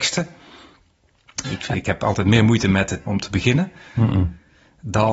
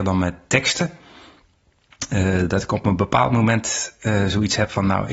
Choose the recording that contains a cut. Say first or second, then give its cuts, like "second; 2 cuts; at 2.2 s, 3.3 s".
first; 2 cuts; at 1.4 s, 3.1 s